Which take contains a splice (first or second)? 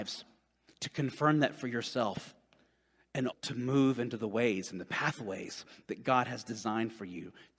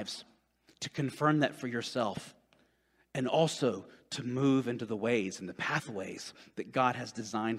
first